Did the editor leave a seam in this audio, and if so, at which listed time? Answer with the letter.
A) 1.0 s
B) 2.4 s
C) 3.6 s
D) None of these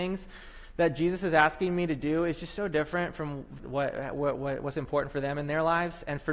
C